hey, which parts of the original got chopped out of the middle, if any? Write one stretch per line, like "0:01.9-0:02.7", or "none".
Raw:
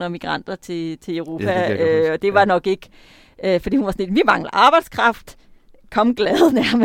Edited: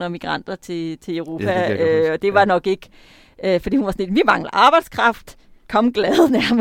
0:05.6-0:05.9